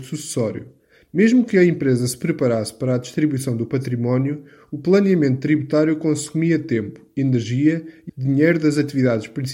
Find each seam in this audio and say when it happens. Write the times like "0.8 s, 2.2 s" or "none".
8.1 s

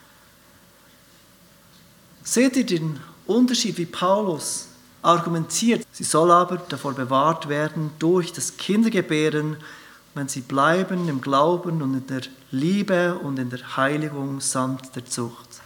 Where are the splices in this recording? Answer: 5.8 s

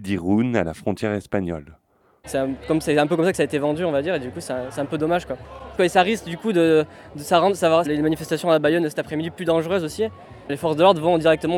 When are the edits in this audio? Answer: 2.2 s, 5.8 s, 7.8 s

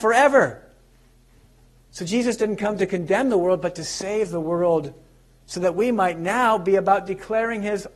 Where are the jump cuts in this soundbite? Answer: none

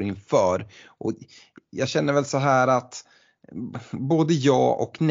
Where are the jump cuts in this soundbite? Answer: none

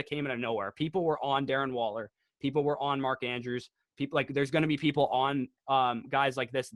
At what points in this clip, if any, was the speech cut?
none

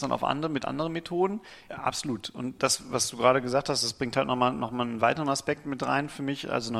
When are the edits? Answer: 1.7 s

